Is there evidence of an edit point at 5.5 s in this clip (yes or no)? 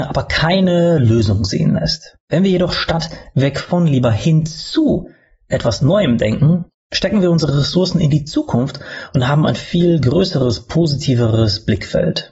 no